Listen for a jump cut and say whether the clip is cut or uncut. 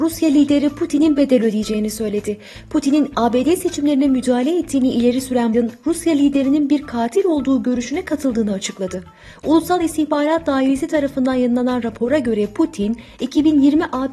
cut